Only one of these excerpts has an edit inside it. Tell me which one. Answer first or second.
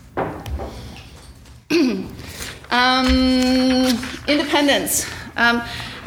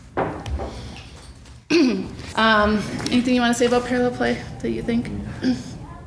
second